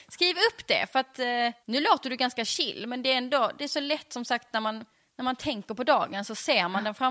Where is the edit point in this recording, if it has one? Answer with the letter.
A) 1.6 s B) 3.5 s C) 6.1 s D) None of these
A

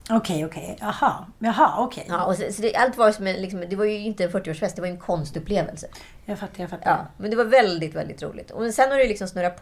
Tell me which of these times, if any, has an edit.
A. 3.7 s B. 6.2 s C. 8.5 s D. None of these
D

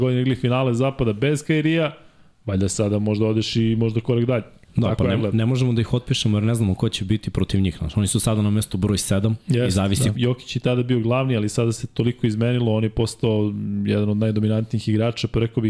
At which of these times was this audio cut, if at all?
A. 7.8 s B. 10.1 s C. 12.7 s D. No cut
B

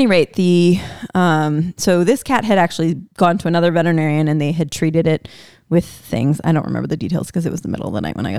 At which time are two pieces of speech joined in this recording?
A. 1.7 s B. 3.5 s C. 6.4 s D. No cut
D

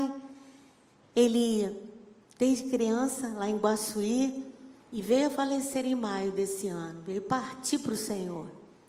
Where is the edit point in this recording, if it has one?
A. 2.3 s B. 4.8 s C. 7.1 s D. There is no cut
B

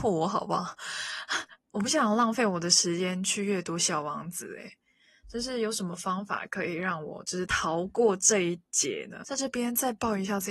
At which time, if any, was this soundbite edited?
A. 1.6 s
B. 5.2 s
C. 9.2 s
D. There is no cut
A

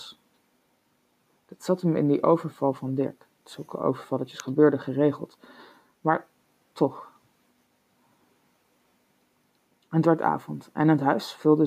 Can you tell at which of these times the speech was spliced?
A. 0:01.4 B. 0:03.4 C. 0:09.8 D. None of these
B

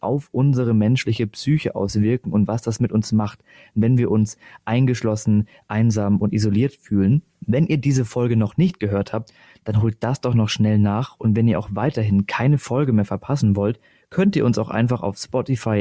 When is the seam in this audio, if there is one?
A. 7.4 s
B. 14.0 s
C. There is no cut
C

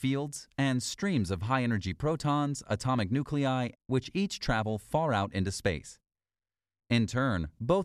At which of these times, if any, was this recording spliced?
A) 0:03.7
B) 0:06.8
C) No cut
A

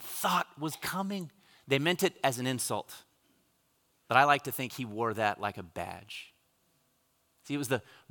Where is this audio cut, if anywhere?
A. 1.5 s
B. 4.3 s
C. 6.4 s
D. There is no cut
A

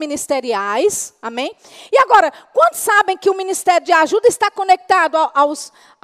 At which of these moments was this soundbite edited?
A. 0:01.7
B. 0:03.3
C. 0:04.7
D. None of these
D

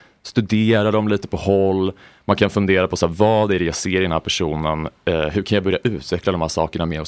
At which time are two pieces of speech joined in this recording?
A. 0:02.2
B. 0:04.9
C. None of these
C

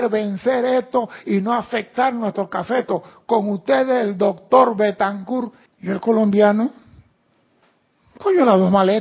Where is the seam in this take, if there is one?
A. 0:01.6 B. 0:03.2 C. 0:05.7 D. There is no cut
C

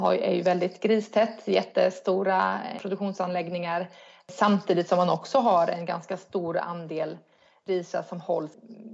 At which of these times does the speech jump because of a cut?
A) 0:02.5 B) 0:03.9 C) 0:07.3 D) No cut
D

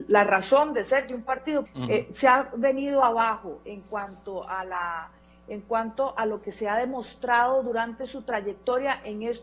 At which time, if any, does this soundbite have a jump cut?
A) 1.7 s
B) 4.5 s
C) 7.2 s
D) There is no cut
A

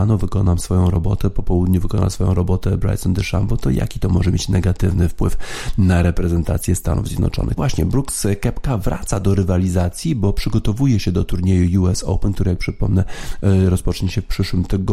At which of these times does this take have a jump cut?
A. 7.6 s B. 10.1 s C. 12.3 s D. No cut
A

